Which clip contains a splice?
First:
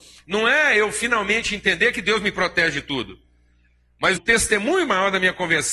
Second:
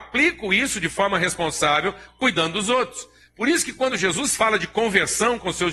first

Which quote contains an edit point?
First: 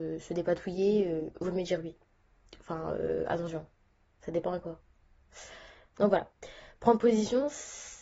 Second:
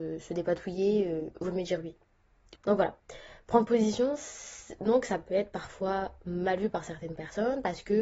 second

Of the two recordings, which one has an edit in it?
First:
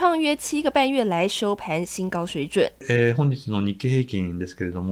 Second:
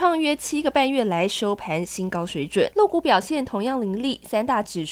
second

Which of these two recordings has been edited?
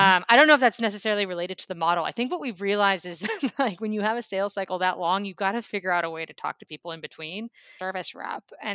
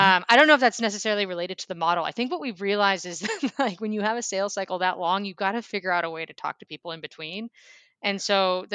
first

